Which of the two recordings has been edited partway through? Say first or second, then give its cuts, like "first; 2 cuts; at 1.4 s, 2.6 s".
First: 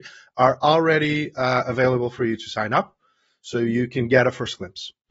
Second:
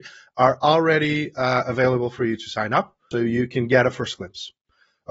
second; 1 cut; at 3.1 s